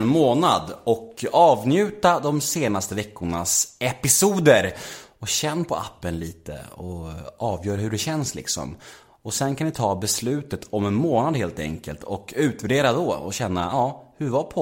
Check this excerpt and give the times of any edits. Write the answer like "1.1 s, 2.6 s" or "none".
none